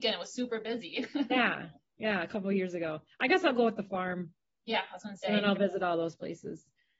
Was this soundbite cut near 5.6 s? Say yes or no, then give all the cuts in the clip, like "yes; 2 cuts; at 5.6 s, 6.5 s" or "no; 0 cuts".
no; 0 cuts